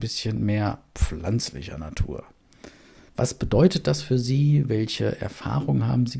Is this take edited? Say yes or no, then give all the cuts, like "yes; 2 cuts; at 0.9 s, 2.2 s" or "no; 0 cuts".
yes; 1 cut; at 3.1 s